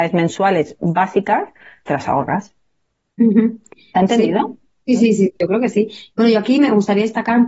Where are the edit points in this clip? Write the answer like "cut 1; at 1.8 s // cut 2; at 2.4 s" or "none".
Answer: cut 1; at 1.8 s